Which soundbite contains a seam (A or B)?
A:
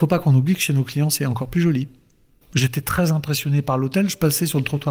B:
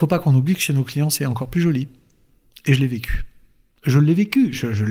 A